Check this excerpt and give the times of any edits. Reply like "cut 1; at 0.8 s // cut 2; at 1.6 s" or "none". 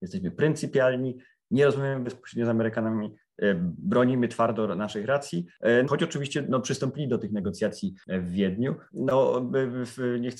cut 1; at 5.8 s // cut 2; at 8.9 s